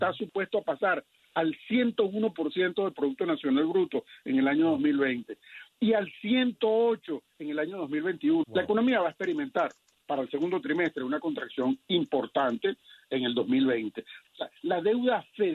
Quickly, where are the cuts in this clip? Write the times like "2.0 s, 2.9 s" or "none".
8.4 s, 14.2 s